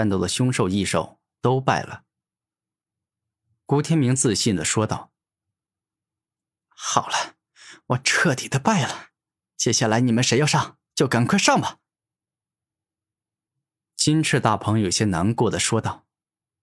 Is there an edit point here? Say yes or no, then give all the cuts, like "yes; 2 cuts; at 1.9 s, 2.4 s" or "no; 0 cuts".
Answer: no; 0 cuts